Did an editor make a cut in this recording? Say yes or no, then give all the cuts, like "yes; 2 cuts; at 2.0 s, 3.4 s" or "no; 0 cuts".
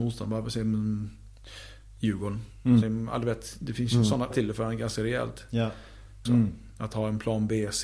yes; 3 cuts; at 2.8 s, 4.3 s, 6.3 s